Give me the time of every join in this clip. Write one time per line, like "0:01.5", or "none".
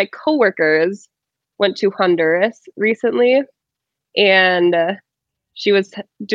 none